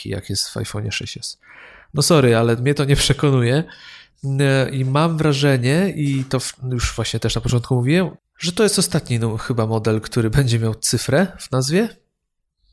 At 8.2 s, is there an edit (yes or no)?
yes